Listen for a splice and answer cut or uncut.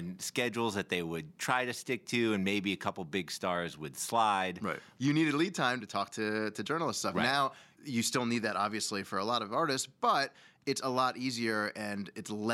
cut